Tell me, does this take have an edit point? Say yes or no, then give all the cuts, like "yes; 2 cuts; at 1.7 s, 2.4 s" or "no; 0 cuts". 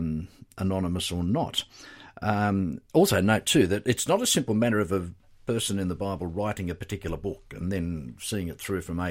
no; 0 cuts